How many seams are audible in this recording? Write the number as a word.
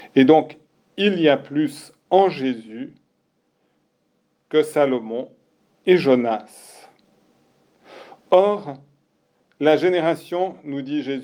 zero